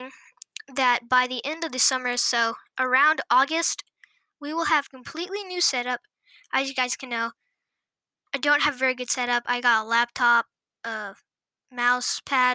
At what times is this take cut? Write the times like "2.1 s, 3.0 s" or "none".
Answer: none